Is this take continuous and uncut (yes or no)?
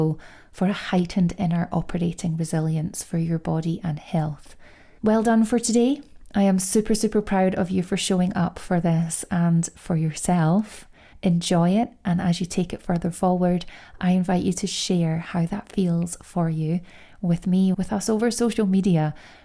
no